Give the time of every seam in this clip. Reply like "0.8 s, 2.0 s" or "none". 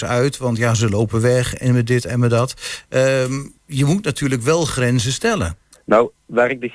5.7 s